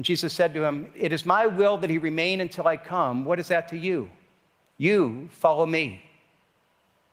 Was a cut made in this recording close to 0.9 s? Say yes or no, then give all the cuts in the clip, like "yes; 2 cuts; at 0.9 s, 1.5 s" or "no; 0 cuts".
yes; 1 cut; at 0.9 s